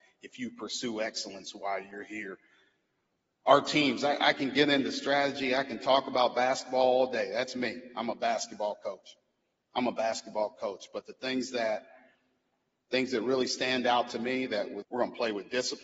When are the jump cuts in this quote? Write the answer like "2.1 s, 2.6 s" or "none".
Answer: 14.8 s